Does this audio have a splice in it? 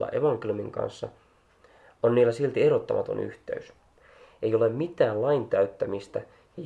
no; 0 cuts

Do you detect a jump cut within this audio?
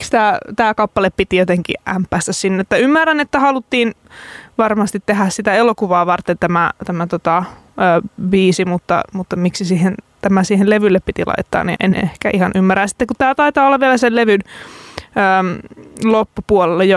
yes; 1 cut; at 11.8 s

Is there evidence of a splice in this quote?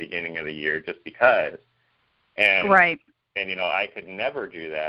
no; 0 cuts

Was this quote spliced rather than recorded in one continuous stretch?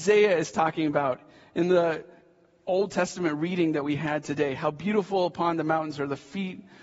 no; 0 cuts

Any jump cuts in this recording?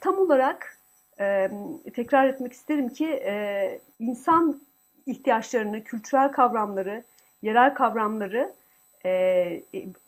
yes; 1 cut; at 3.9 s

